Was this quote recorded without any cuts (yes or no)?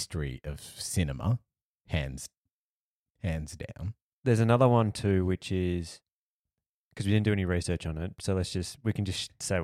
no